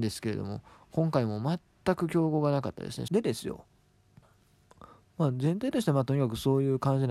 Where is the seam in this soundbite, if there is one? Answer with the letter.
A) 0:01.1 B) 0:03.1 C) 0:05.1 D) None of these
B